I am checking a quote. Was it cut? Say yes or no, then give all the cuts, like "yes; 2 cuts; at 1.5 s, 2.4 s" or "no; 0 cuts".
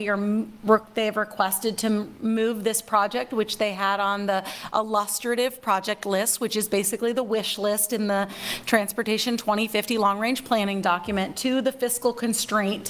no; 0 cuts